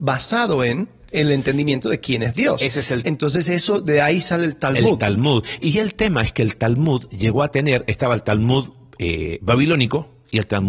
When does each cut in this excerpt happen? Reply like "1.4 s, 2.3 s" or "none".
none